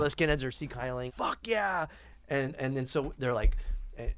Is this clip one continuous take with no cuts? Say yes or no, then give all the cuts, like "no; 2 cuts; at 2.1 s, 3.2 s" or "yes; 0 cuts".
no; 1 cut; at 1.1 s